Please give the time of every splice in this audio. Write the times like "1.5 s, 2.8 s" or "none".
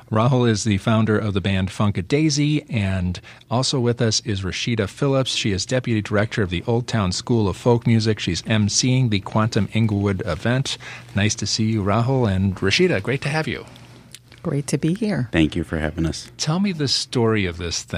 none